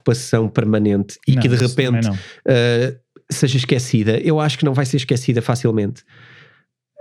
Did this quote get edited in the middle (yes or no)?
no